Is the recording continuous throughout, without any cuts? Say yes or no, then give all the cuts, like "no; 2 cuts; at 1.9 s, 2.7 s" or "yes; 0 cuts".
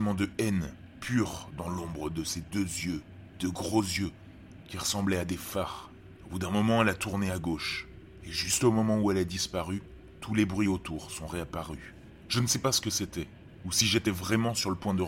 yes; 0 cuts